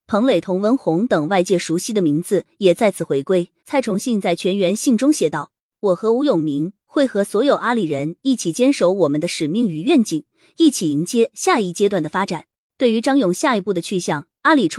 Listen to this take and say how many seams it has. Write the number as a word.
one